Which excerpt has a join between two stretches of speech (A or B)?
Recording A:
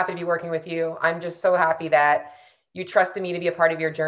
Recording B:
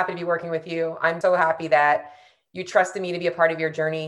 B